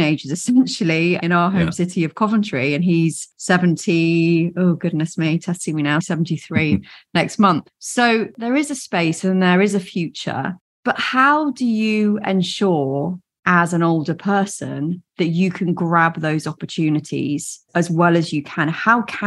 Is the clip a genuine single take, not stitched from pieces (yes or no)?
no